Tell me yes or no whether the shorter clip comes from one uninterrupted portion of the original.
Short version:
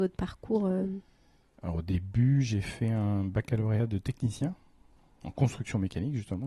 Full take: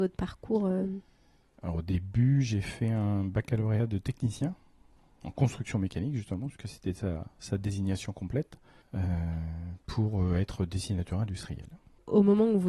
yes